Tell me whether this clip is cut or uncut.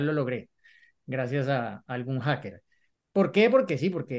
cut